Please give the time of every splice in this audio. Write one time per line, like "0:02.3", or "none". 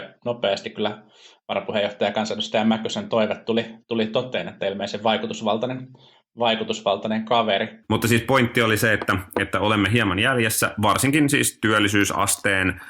0:07.8

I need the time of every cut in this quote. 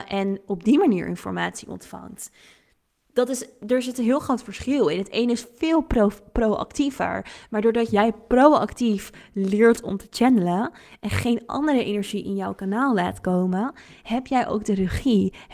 none

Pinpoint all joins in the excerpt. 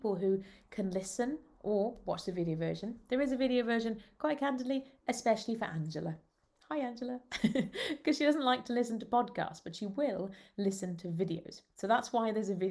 none

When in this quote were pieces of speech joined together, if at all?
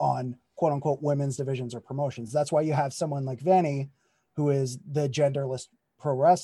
none

